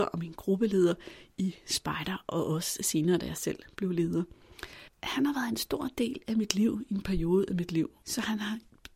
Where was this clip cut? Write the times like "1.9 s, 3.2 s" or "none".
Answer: 8.0 s